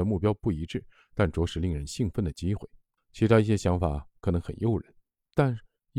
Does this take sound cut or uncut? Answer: cut